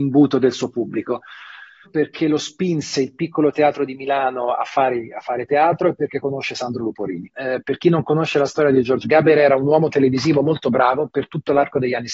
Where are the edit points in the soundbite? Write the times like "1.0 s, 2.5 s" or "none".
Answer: 1.8 s, 7.3 s, 9.0 s